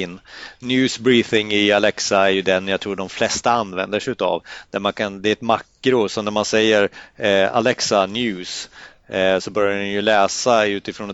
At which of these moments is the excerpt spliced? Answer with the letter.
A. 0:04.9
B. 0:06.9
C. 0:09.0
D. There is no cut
D